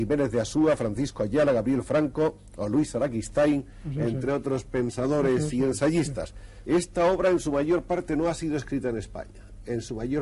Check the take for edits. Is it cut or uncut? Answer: cut